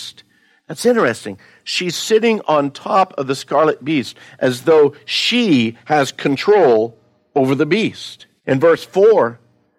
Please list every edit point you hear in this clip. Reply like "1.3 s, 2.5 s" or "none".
8.4 s